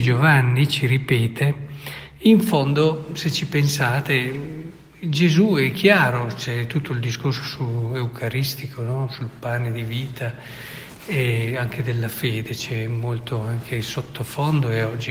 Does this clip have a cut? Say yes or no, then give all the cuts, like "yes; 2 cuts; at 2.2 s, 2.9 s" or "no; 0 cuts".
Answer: no; 0 cuts